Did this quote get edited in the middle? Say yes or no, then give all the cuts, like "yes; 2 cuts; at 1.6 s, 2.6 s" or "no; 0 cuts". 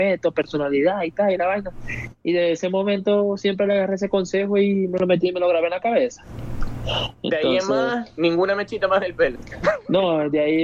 no; 0 cuts